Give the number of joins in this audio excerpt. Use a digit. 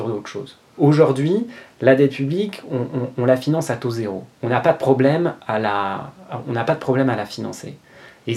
1